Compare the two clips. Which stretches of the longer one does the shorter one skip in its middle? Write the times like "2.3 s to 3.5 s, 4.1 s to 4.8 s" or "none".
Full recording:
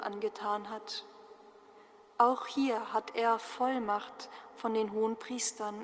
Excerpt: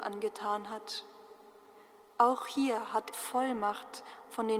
3.1 s to 3.4 s